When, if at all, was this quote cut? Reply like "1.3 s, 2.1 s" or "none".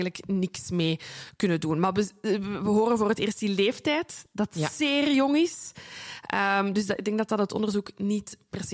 none